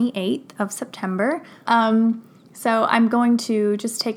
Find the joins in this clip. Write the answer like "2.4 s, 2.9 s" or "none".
1.7 s